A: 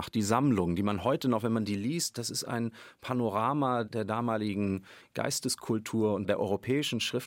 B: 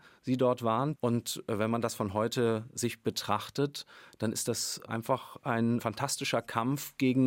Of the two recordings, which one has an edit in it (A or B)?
B